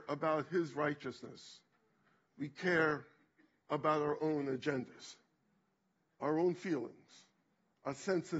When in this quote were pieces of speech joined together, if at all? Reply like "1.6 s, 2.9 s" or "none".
none